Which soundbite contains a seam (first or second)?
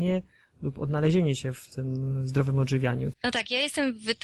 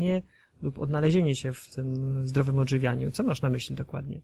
first